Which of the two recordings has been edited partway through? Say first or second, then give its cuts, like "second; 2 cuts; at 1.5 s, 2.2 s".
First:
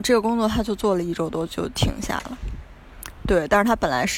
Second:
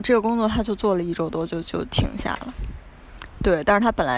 first; 1 cut; at 1.5 s